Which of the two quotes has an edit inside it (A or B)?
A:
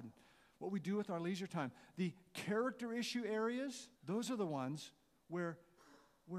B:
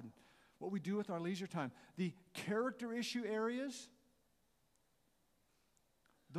A